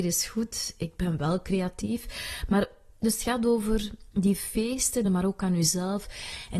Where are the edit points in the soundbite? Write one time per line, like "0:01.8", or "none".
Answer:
0:05.1